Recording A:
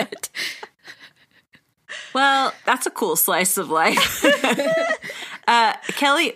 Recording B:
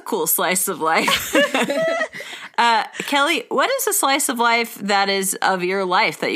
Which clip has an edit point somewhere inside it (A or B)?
A